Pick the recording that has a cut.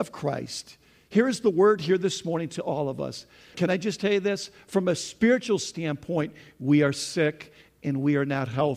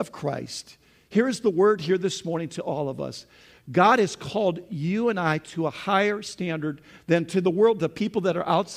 first; 1 cut; at 3.5 s

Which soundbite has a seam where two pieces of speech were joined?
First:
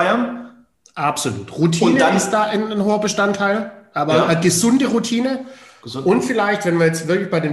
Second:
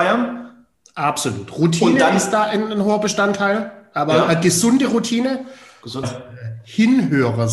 second; 1 cut; at 6.0 s

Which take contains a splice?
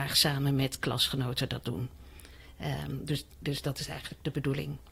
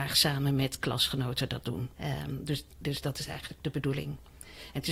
second; 1 cut; at 1.9 s

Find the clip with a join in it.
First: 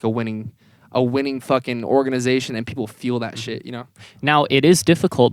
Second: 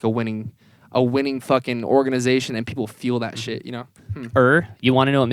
second; 1 cut; at 4.0 s

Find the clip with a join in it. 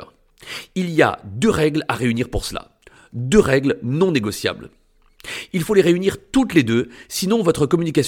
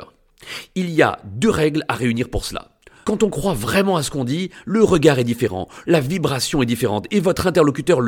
second; 2 cuts; at 3.0 s, 5.8 s

